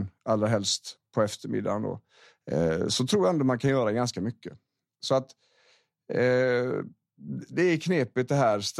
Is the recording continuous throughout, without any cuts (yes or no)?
no